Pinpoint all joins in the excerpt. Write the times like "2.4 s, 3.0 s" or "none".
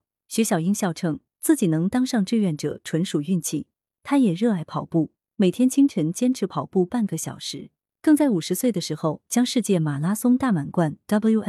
3.9 s